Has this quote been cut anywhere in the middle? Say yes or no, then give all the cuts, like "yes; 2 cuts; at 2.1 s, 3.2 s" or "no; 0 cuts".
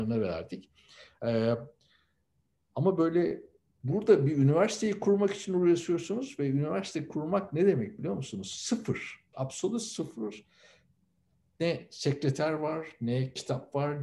yes; 1 cut; at 9.3 s